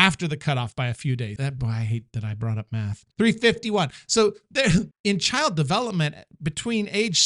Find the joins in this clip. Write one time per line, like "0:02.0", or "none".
0:01.4
0:03.1
0:04.9